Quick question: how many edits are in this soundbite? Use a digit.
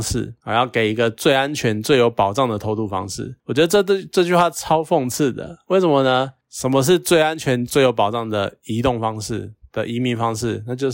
1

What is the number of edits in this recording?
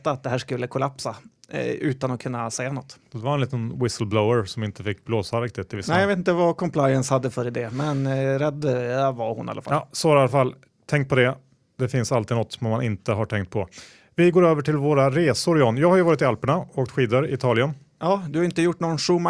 0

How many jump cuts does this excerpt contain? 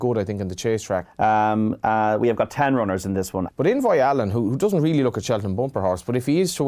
2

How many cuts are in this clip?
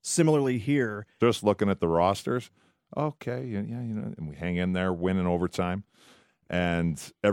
2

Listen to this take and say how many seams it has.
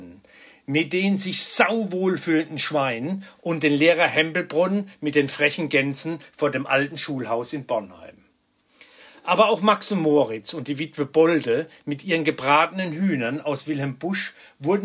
0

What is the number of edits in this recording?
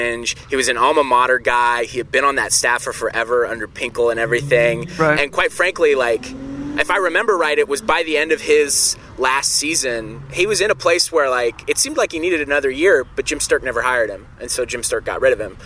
0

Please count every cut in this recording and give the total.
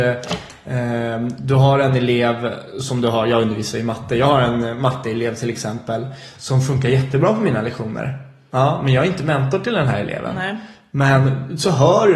0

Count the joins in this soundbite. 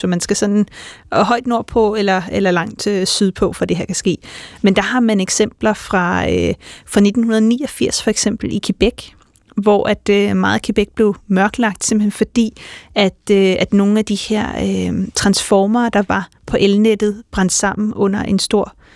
0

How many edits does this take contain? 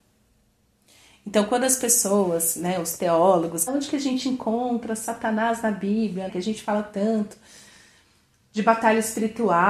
2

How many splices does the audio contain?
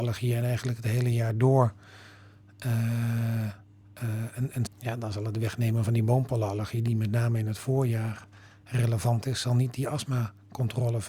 1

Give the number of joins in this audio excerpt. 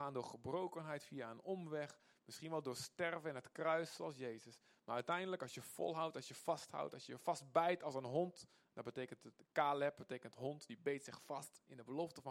0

